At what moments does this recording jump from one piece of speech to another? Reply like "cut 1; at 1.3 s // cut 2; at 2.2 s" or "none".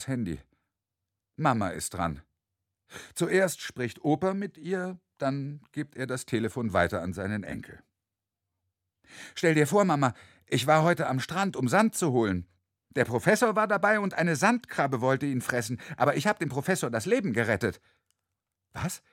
none

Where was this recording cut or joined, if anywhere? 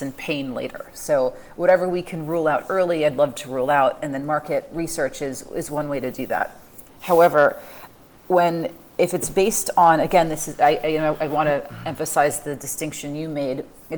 none

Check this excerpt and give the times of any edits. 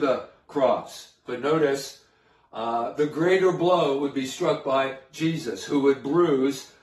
cut 1; at 1.2 s

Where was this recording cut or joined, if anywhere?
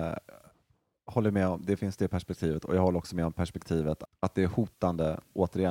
cut 1; at 4.1 s

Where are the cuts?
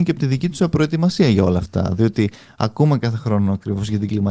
none

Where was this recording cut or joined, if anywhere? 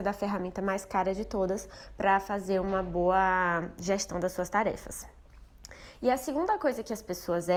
none

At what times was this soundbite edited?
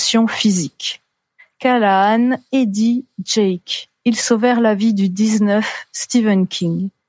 none

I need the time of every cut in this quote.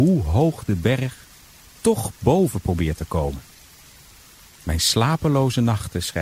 cut 1; at 4.5 s

